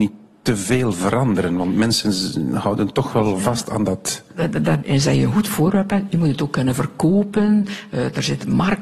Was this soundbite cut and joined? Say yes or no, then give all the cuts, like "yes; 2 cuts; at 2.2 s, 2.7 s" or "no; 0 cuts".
yes; 1 cut; at 4.8 s